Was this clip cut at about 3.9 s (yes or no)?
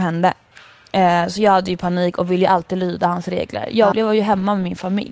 yes